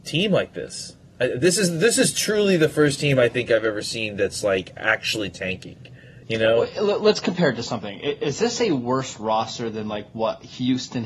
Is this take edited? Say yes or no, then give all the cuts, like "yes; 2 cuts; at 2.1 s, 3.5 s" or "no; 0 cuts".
no; 0 cuts